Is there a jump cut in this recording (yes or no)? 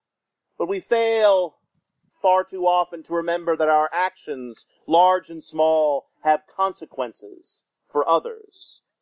no